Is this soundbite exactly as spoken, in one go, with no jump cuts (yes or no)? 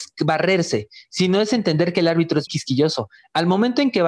no